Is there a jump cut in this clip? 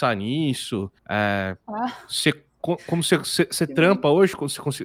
yes; 1 cut; at 1.0 s

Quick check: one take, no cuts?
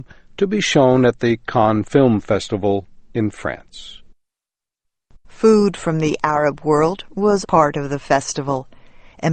no; 1 cut; at 7.4 s

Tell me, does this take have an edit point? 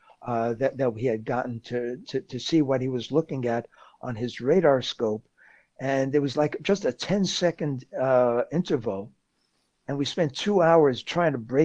yes; 1 cut; at 2.0 s

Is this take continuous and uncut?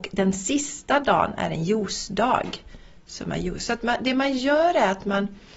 yes; 0 cuts

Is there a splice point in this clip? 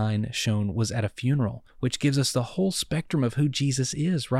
yes; 1 cut; at 1.7 s

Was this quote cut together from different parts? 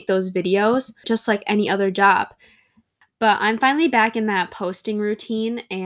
yes; 2 cuts; at 1.0 s, 3.0 s

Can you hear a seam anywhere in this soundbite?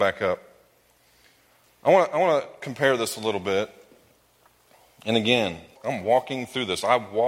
yes; 1 cut; at 5.8 s

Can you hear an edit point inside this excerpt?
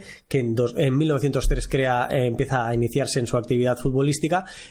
no; 0 cuts

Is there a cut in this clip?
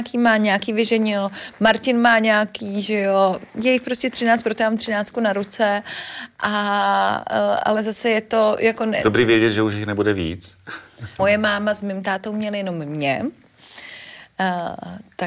yes; 1 cut; at 11.2 s

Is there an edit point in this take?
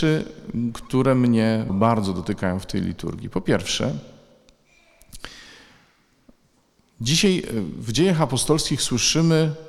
yes; 1 cut; at 1.7 s

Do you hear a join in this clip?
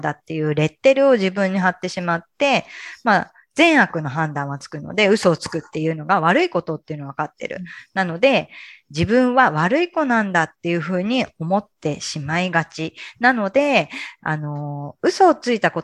no; 0 cuts

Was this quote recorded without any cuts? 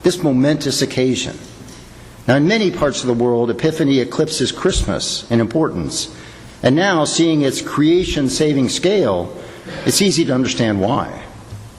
yes; 0 cuts

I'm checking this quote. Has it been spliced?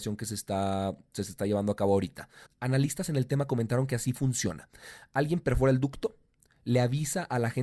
yes; 1 cut; at 2.5 s

